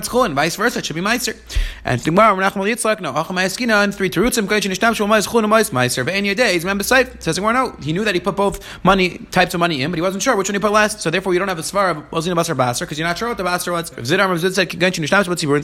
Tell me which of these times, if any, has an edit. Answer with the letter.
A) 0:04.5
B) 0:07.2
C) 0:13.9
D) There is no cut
C